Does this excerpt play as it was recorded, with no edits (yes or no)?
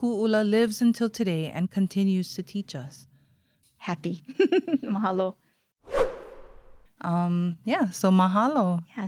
no